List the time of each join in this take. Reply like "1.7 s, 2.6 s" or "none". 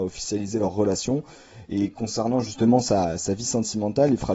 1.6 s